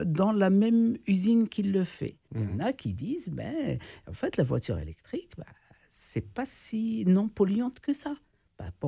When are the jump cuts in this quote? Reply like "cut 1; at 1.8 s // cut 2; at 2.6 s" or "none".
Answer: cut 1; at 2.3 s